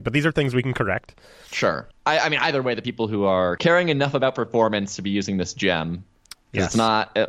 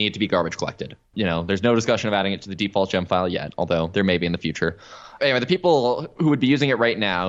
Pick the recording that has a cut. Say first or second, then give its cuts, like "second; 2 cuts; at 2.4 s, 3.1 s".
second; 1 cut; at 1.1 s